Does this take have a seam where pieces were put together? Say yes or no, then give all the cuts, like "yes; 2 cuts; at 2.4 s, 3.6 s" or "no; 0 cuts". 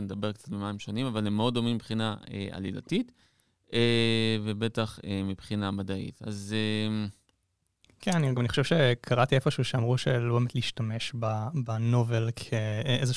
no; 0 cuts